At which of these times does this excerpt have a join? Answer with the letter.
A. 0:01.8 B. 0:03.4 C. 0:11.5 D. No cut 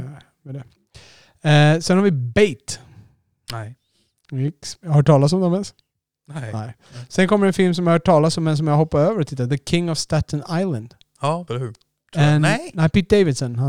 C